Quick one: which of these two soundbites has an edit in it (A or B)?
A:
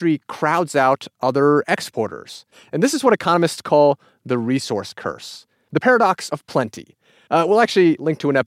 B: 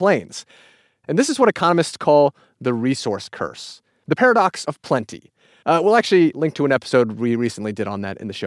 B